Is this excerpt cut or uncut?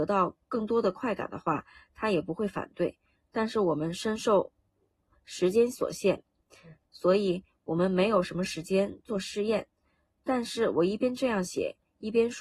cut